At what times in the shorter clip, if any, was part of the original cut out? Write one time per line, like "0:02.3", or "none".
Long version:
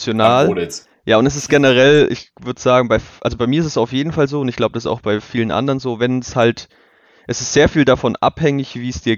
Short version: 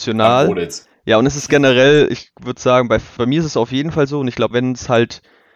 0:03.2
0:04.5